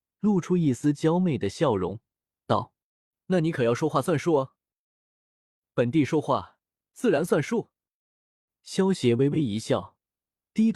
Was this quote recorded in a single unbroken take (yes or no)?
yes